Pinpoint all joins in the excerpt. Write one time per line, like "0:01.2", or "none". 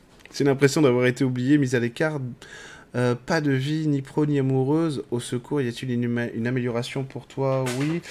none